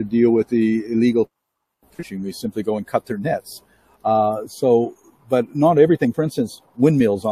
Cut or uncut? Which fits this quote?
uncut